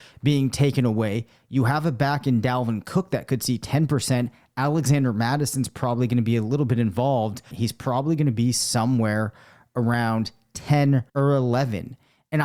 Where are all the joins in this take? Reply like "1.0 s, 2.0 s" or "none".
7.5 s, 11.1 s